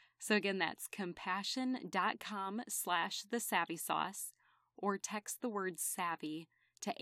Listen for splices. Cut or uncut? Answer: uncut